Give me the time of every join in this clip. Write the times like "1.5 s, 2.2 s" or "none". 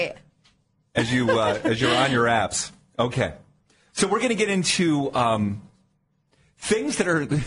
none